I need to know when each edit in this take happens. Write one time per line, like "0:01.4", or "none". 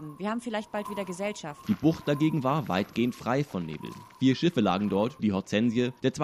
0:01.6
0:05.2